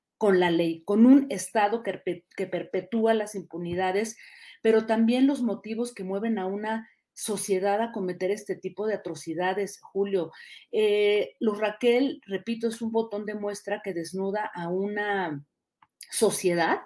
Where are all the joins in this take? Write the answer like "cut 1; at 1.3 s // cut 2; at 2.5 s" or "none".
none